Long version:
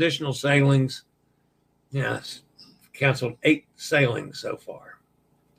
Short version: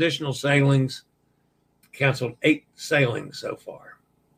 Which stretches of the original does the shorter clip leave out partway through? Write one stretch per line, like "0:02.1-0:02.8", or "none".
0:01.8-0:02.8